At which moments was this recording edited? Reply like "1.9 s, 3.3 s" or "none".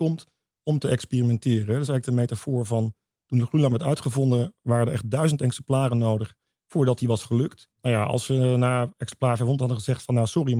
7.7 s